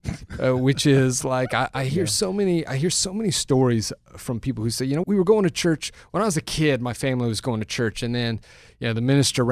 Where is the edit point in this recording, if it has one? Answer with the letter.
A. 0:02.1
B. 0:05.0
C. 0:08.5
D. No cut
B